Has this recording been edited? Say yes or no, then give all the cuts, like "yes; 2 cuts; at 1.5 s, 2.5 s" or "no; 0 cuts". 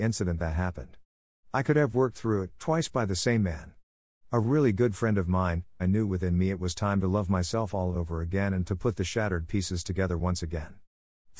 yes; 2 cuts; at 2.6 s, 5.8 s